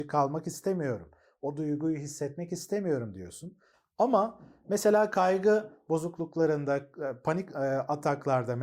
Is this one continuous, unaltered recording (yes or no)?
yes